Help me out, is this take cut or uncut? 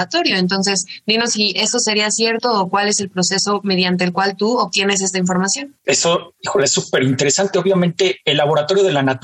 uncut